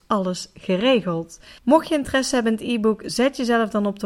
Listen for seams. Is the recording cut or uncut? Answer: cut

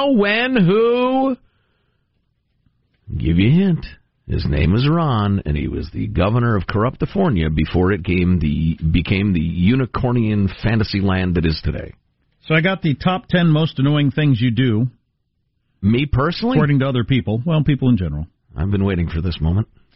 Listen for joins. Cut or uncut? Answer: uncut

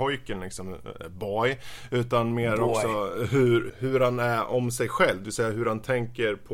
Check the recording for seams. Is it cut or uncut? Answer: cut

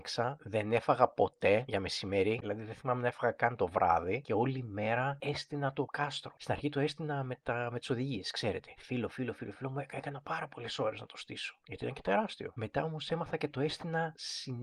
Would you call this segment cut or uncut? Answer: cut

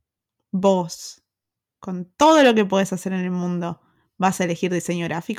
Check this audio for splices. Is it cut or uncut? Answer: uncut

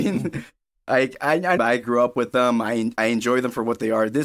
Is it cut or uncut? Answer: cut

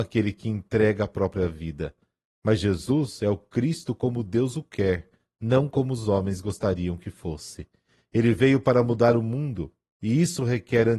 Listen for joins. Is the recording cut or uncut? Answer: uncut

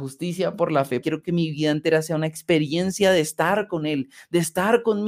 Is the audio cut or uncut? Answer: cut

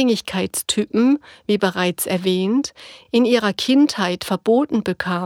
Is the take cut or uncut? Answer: uncut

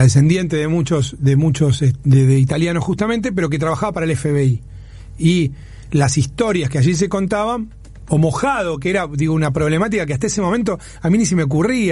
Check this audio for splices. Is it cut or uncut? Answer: uncut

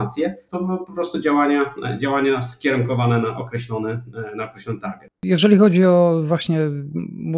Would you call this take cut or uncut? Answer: uncut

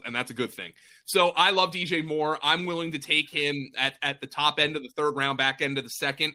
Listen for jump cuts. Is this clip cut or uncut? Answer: uncut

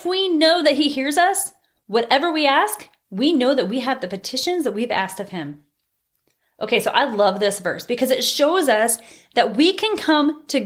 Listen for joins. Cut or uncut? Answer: uncut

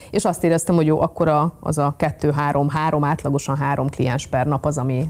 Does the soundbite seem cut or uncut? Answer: uncut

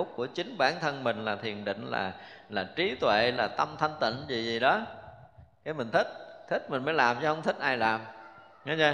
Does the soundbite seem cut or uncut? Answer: uncut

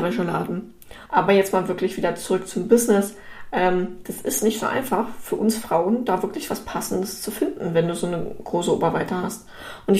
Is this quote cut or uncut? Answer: cut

